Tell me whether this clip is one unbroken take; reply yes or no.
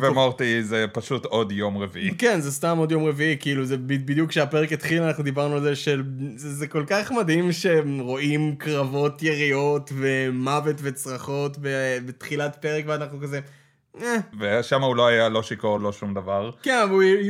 no